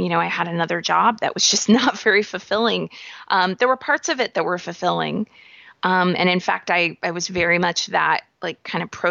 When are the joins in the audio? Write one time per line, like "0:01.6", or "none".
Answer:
none